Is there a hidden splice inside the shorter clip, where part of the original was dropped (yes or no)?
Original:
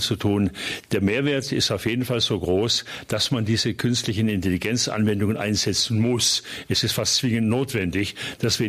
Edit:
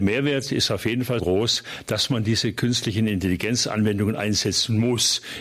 yes